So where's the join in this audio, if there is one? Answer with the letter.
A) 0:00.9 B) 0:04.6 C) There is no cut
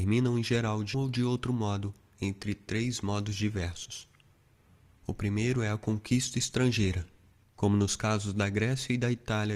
A